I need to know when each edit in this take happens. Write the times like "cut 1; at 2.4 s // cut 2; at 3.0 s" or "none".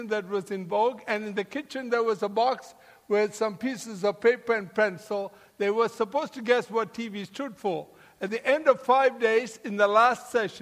none